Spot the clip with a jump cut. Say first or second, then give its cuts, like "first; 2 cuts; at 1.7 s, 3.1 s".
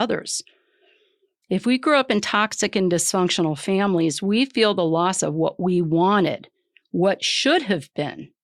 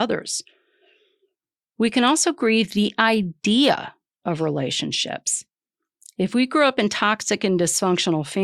first; 1 cut; at 1.4 s